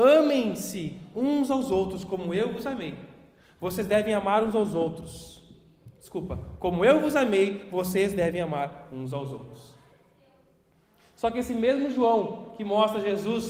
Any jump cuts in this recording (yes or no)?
no